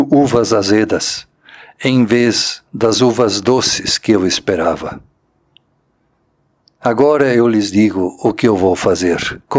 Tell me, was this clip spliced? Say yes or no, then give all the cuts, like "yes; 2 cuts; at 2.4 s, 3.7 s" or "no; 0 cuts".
no; 0 cuts